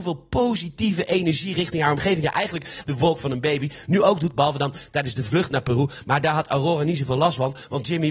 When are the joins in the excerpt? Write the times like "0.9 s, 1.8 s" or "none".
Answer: 2.8 s